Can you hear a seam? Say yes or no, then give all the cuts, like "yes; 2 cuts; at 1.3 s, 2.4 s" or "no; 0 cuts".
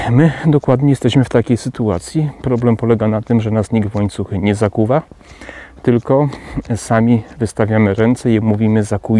no; 0 cuts